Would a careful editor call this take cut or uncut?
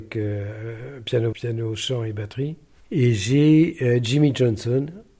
cut